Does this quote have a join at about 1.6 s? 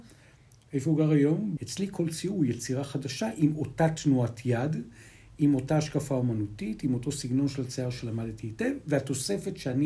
yes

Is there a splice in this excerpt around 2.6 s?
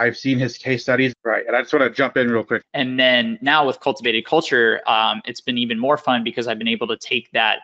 yes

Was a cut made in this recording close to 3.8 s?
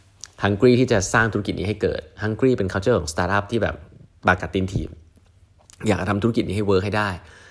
no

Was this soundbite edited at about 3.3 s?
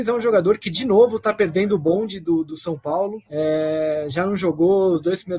yes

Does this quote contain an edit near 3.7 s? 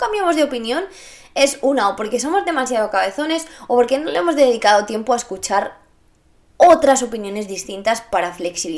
yes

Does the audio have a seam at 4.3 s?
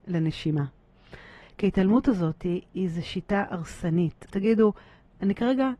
yes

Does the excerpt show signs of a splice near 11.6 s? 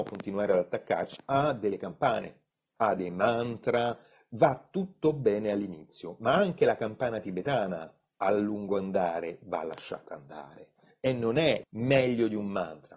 yes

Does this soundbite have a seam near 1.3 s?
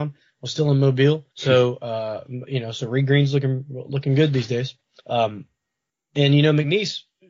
yes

